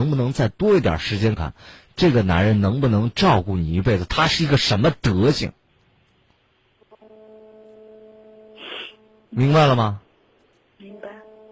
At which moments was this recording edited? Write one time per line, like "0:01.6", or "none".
0:01.4